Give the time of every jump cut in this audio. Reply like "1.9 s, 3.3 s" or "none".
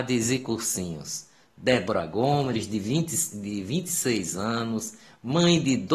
none